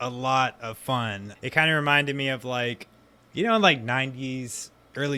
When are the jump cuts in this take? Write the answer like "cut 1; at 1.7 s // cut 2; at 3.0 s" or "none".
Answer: cut 1; at 1.4 s